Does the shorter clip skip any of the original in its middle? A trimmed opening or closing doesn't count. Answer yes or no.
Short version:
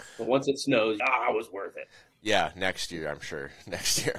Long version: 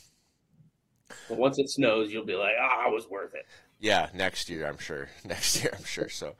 yes